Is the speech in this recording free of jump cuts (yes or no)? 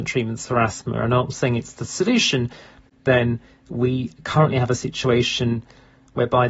no